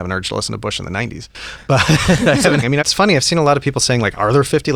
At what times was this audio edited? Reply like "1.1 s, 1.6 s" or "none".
2.6 s